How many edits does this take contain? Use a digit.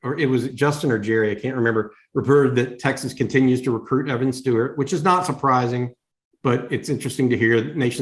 0